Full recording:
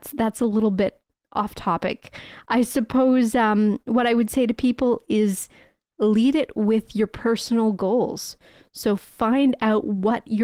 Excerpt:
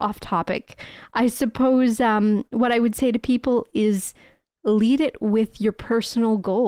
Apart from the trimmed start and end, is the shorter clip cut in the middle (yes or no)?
no